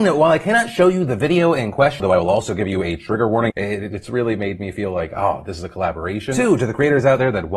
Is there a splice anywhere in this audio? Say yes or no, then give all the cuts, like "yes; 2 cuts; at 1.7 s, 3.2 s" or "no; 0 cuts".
yes; 2 cuts; at 2.0 s, 3.5 s